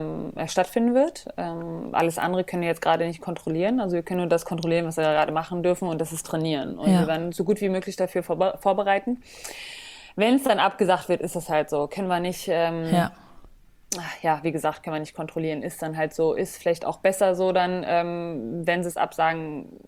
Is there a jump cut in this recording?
no; 0 cuts

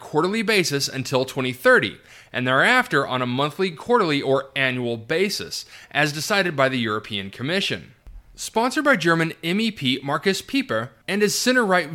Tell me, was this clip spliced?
no; 0 cuts

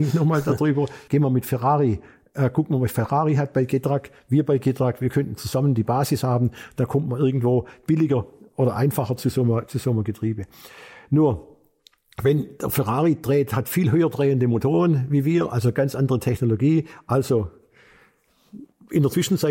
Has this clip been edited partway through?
yes; 1 cut; at 1.1 s

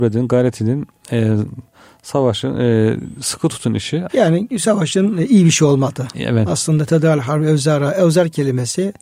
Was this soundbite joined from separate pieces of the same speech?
yes; 1 cut; at 4.1 s

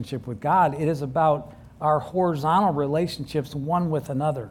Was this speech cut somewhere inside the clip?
no; 0 cuts

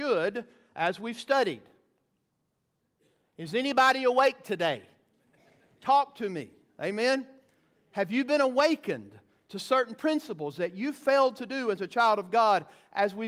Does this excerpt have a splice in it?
no; 0 cuts

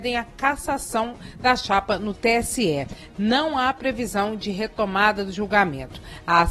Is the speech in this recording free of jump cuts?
yes; 0 cuts

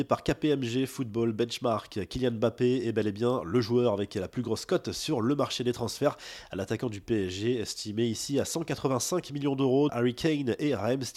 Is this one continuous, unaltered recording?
no; 1 cut; at 9.9 s

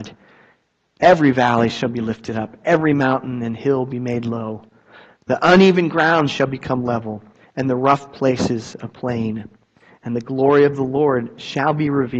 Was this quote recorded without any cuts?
yes; 0 cuts

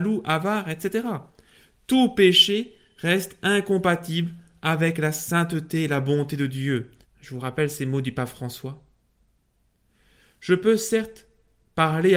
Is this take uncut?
no; 1 cut; at 7.0 s

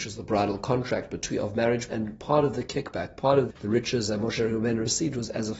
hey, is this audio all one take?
no; 2 cuts; at 1.9 s, 3.5 s

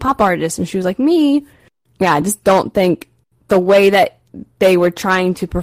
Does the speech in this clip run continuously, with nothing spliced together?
yes; 0 cuts

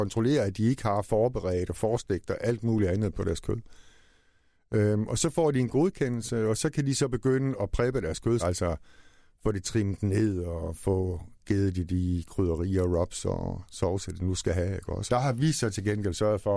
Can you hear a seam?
yes; 2 cuts; at 8.4 s, 15.1 s

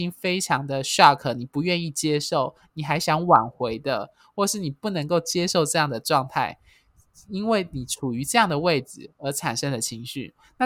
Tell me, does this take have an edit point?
no; 0 cuts

